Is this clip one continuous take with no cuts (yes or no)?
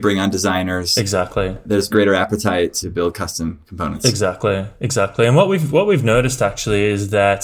yes